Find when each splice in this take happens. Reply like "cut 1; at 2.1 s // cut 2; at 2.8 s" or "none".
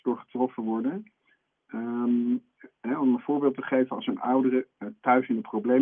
cut 1; at 1.6 s